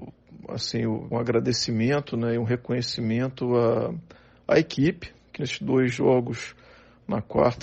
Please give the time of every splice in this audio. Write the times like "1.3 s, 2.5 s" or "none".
1.1 s, 5.4 s